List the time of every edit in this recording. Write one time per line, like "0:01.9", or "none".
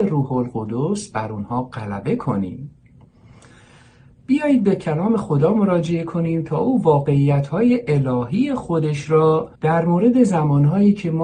0:09.5